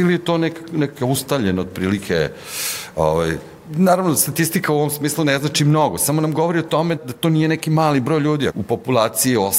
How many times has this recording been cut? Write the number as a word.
two